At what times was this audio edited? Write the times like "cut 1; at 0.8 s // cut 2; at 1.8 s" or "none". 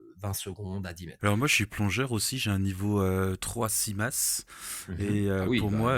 cut 1; at 1.2 s